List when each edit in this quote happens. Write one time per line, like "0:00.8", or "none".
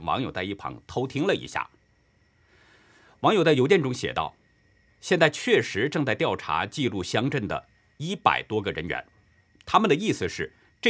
none